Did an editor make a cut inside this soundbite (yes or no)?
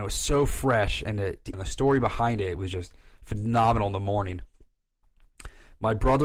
yes